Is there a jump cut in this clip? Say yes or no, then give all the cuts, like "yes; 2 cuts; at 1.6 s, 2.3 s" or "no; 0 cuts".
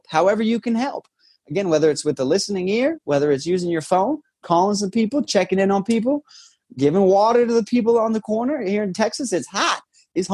yes; 1 cut; at 4.4 s